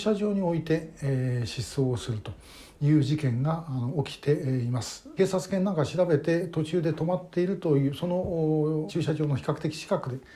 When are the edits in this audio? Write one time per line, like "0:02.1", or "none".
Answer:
0:05.2
0:08.9